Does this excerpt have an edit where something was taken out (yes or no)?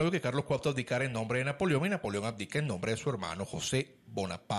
no